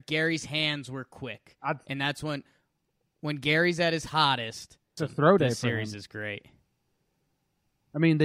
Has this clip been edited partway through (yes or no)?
yes